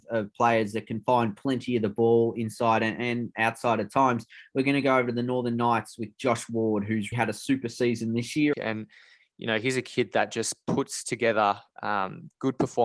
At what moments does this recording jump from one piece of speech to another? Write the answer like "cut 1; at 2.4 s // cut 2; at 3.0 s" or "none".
cut 1; at 7.1 s // cut 2; at 8.5 s